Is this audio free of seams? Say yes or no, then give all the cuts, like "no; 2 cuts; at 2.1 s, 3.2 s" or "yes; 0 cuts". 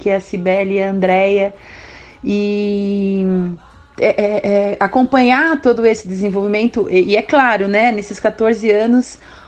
no; 1 cut; at 4.0 s